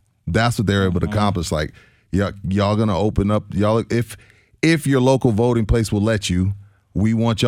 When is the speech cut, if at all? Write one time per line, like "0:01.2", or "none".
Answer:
none